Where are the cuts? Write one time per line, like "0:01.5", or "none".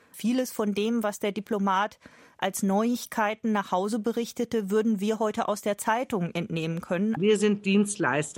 0:07.2